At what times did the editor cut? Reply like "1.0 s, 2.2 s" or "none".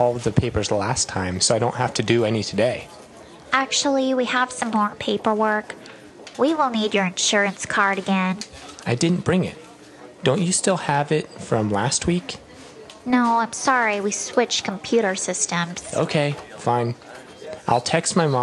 8.8 s

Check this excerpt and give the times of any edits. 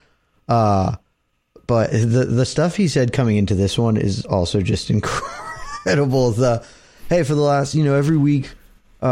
none

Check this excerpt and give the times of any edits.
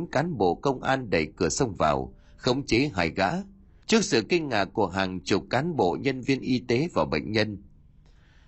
3.8 s

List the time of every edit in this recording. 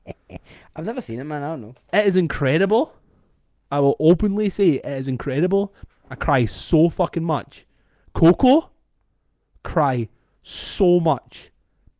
5.9 s

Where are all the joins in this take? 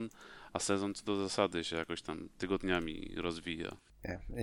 none

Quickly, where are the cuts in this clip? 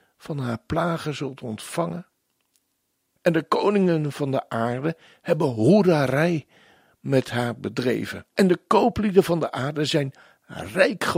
3.2 s, 8.3 s

